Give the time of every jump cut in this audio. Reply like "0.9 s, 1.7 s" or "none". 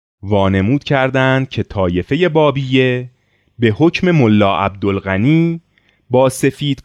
none